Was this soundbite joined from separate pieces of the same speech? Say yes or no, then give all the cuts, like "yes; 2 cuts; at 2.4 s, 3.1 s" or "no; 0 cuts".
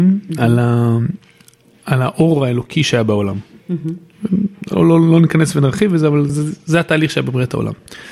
yes; 2 cuts; at 3.6 s, 6.3 s